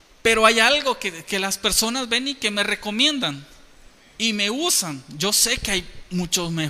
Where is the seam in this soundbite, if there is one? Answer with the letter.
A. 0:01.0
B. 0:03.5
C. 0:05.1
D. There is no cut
D